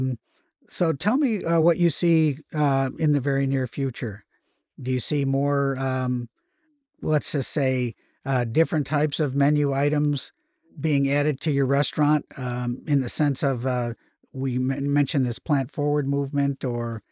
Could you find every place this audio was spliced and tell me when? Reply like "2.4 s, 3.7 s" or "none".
none